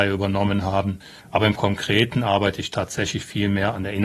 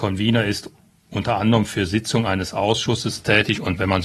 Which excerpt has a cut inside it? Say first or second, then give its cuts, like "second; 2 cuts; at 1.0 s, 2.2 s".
first; 1 cut; at 1.2 s